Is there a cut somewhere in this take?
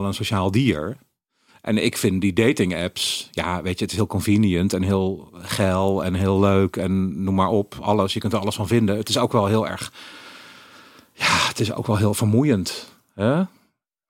no; 0 cuts

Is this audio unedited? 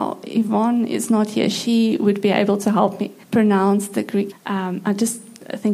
no; 2 cuts; at 3.2 s, 4.3 s

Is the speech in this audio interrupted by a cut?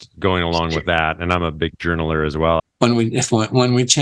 yes; 1 cut; at 2.6 s

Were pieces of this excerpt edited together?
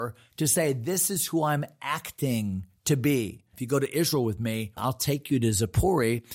yes; 2 cuts; at 3.5 s, 4.8 s

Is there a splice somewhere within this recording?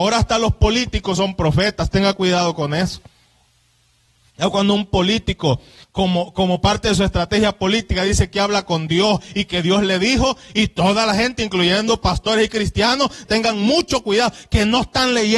yes; 1 cut; at 13.2 s

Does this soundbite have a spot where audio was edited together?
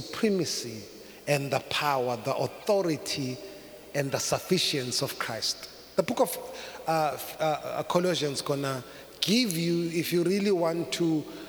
no; 0 cuts

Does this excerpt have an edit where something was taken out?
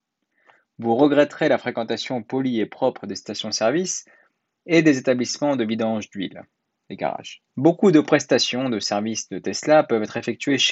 yes; 1 cut; at 7.5 s

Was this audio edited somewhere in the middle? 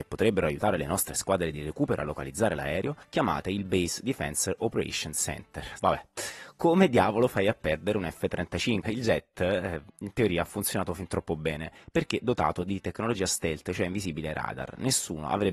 yes; 2 cuts; at 5.8 s, 8.8 s

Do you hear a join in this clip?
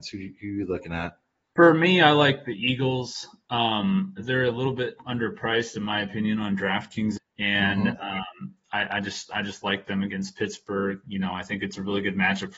yes; 2 cuts; at 4.2 s, 7.2 s

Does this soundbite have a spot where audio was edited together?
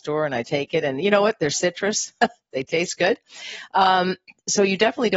no; 0 cuts

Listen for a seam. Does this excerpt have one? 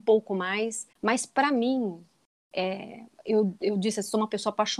yes; 1 cut; at 0.9 s

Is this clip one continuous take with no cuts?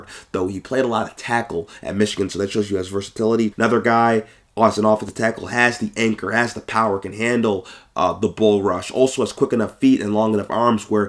no; 1 cut; at 3.5 s

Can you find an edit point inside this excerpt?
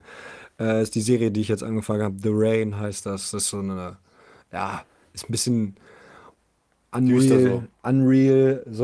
no; 0 cuts

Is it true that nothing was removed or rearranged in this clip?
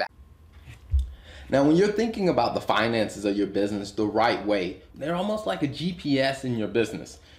no; 1 cut; at 4.9 s

